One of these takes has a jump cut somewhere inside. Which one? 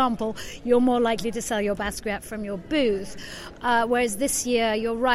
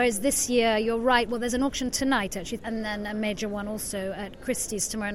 second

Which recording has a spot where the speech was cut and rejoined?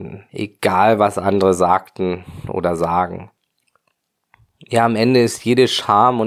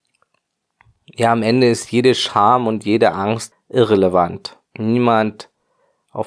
second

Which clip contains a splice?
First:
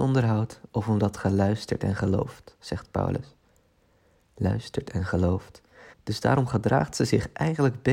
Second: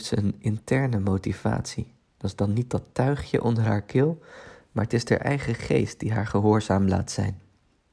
first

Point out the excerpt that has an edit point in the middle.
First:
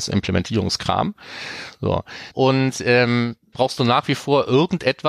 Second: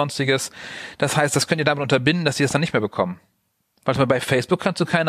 first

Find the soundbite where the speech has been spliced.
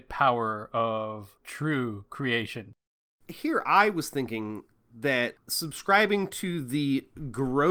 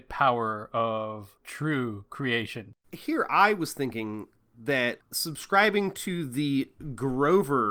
second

